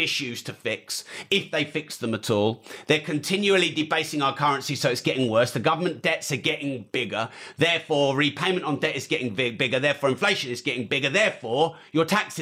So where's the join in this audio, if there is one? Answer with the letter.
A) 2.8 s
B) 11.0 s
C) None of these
C